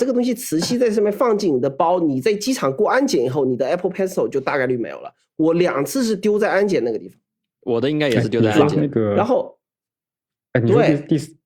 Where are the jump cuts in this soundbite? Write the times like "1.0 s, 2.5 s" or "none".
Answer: none